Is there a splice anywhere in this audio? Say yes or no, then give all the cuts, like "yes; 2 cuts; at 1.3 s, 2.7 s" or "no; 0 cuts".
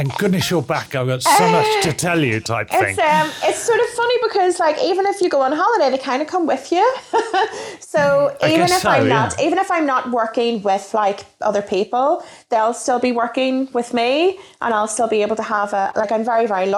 no; 0 cuts